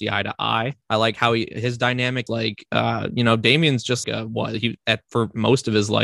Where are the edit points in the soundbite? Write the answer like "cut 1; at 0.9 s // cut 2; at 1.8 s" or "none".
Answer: cut 1; at 2.3 s // cut 2; at 4.0 s